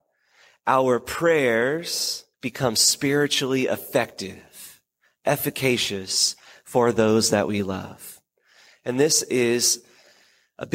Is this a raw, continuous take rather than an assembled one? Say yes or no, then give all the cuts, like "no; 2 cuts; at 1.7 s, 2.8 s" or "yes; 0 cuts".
no; 1 cut; at 2.3 s